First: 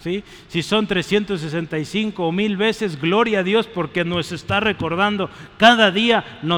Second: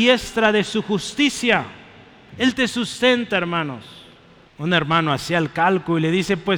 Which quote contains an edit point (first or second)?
second